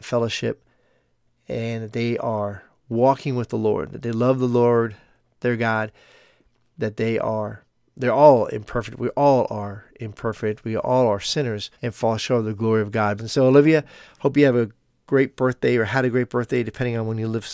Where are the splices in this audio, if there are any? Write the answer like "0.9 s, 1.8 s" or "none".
11.7 s, 13.2 s